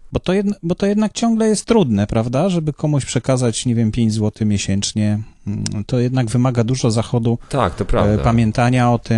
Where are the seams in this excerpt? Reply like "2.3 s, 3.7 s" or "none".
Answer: 5.9 s